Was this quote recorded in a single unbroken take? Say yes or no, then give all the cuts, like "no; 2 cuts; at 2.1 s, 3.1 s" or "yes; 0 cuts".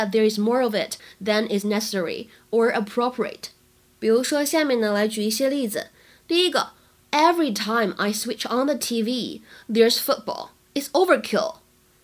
yes; 0 cuts